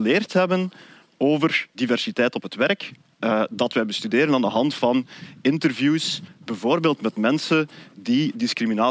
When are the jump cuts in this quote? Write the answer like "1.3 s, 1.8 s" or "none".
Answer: 1.7 s